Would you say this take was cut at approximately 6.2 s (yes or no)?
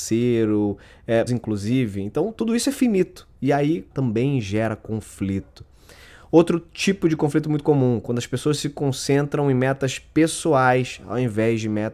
no